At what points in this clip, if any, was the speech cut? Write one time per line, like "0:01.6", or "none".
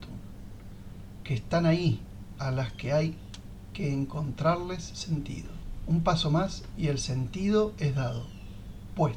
0:02.4